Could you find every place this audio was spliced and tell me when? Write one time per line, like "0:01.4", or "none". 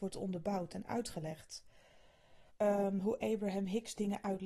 0:02.5